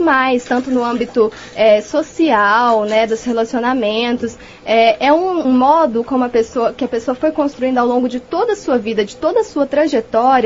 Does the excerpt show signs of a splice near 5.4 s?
yes; 1 cut; at 5.4 s

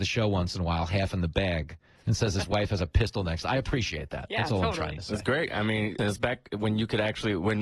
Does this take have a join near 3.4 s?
no; 1 cut; at 6.0 s

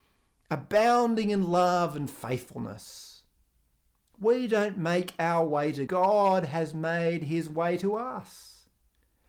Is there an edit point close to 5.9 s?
yes; 1 cut; at 5.9 s

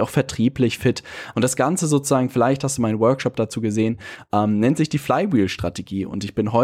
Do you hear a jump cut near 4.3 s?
no; 1 cut; at 1.3 s

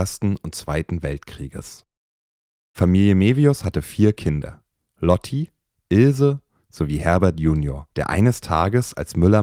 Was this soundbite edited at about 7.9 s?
yes; 2 cuts; at 5.7 s, 7.9 s

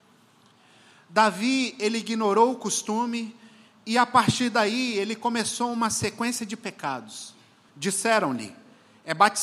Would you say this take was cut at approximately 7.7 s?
yes; 1 cut; at 7.7 s

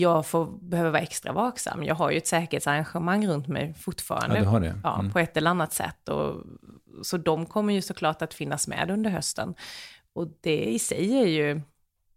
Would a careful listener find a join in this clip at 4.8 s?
no; 0 cuts

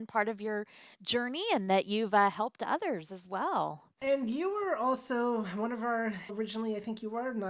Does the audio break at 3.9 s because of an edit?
no; 1 cut; at 6.3 s

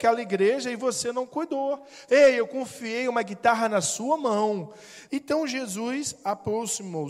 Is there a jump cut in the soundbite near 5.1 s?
yes; 2 cuts; at 2.1 s, 5.1 s

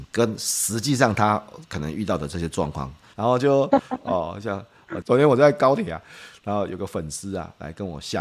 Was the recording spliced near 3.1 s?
yes; 2 cuts; at 3.1 s, 5.0 s

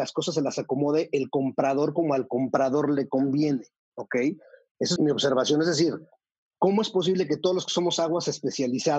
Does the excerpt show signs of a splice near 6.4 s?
no; 1 cut; at 5.0 s

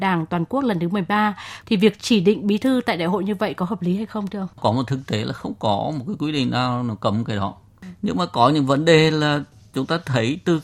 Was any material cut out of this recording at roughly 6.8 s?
no; 2 cuts; at 1.6 s, 4.5 s

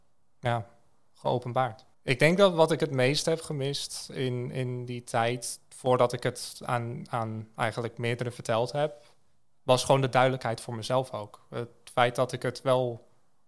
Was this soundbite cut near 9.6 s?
yes; 2 cuts; at 1.9 s, 9.6 s

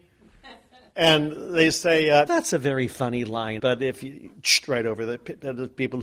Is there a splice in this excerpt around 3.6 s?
yes; 2 cuts; at 2.3 s, 3.6 s

